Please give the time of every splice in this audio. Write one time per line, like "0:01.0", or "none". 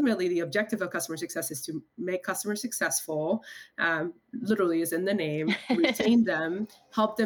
none